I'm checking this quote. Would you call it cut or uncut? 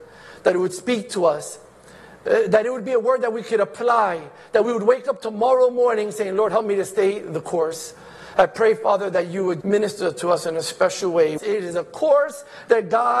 cut